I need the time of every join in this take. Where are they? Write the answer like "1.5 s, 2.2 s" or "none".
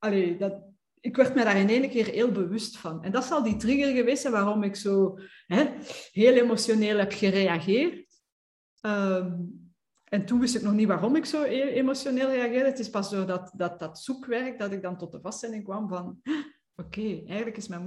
13.8 s